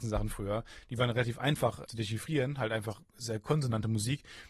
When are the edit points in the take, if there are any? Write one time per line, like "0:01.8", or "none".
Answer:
0:01.9